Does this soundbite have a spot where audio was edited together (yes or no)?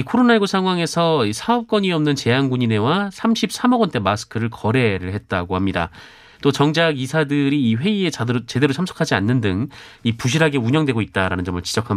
yes